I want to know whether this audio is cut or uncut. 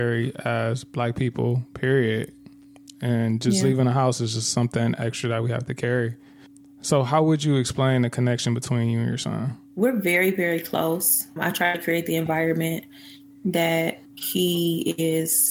cut